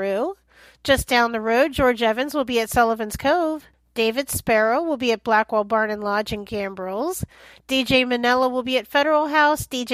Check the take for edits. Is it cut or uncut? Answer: uncut